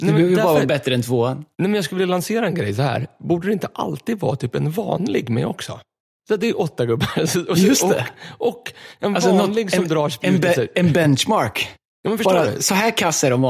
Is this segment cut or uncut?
uncut